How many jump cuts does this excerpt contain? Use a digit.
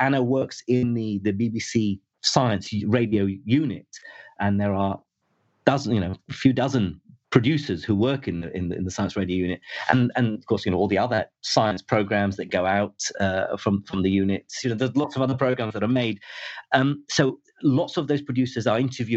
2